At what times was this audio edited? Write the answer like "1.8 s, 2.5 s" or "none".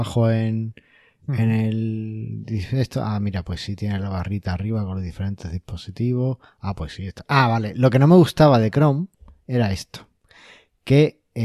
none